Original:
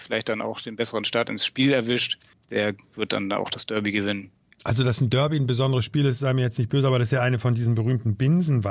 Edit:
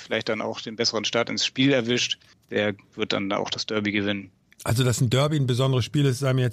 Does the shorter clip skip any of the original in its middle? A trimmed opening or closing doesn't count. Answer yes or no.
no